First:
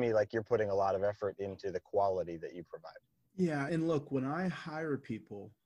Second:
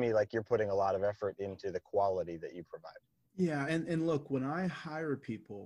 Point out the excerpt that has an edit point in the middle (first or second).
first